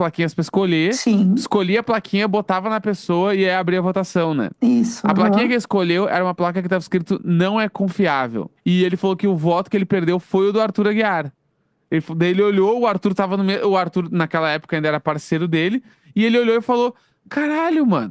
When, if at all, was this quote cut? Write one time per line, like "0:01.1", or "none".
0:08.6